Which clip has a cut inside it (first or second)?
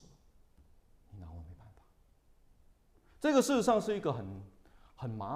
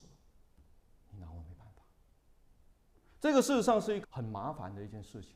second